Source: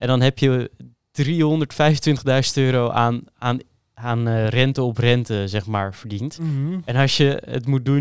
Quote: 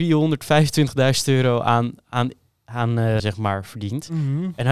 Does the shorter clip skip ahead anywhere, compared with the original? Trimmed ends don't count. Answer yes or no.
yes